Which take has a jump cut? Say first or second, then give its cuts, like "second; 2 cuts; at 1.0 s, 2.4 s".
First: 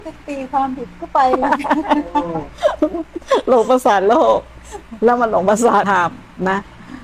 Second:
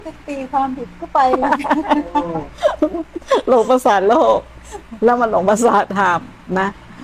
first; 1 cut; at 5.8 s